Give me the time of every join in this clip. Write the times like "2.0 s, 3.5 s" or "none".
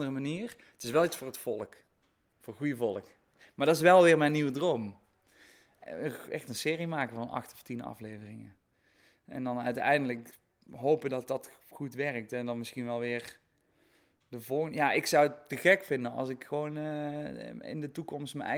none